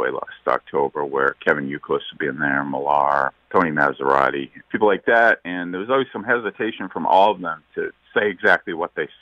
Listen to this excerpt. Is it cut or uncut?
cut